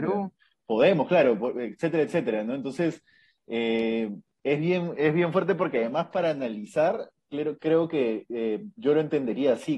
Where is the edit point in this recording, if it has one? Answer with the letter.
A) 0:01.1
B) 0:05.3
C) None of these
C